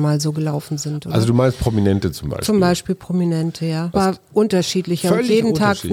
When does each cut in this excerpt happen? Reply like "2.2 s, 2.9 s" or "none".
3.9 s